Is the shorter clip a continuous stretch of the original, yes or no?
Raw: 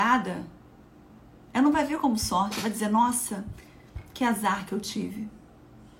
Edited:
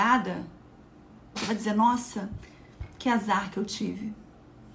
no